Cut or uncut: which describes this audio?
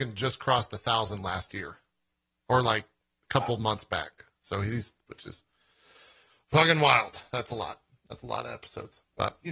cut